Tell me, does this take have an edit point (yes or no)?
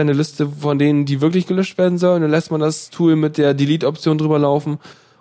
no